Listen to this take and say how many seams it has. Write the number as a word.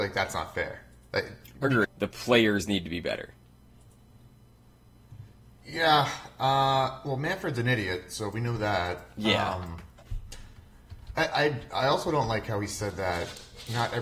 one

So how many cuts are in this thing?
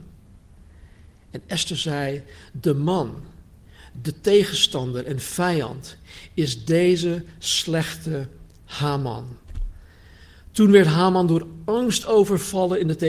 zero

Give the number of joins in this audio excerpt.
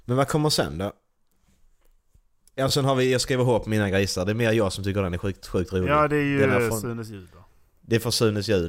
zero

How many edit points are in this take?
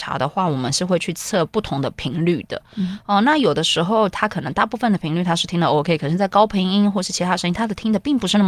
zero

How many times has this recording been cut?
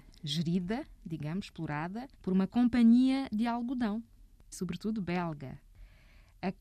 two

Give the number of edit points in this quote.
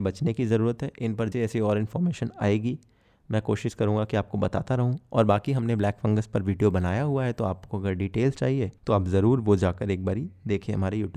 two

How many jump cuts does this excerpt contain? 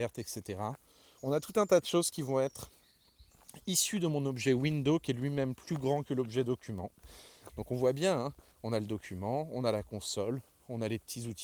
two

